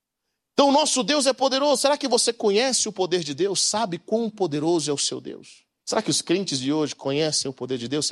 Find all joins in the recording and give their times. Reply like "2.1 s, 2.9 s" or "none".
5.8 s

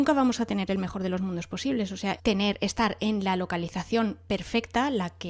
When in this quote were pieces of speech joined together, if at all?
2.2 s

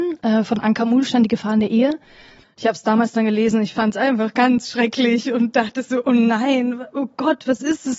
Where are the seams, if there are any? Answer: 2.4 s

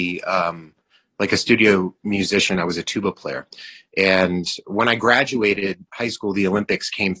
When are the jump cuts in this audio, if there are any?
none

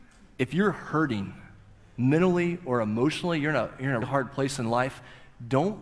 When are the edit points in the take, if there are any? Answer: 4.0 s

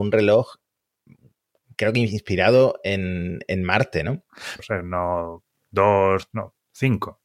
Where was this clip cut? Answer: 4.6 s, 6.3 s

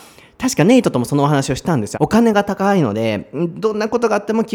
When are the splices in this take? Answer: 1.9 s

